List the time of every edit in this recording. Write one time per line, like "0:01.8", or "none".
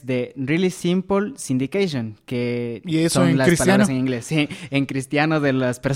none